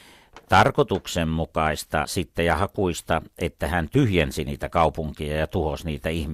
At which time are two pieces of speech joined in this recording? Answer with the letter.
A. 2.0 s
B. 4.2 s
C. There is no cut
A